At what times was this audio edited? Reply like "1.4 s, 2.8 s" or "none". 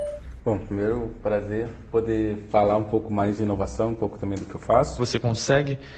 5.0 s